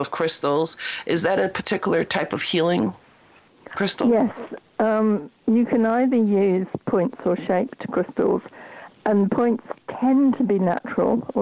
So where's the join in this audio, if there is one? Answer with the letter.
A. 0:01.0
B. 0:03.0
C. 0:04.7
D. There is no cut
D